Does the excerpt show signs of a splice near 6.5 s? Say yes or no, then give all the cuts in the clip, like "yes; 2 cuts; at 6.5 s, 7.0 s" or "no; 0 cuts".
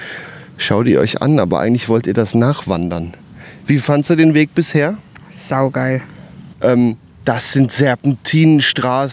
yes; 1 cut; at 6.5 s